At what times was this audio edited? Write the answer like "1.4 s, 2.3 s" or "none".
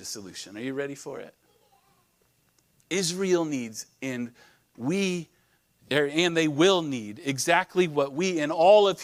none